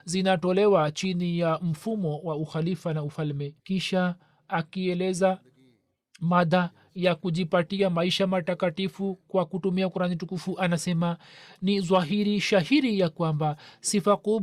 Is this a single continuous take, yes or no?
no